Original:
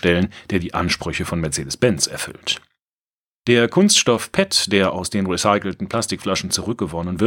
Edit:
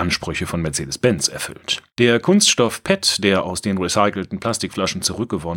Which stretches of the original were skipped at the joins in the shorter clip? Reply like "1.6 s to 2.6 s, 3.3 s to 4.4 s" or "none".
2.7 s to 3.4 s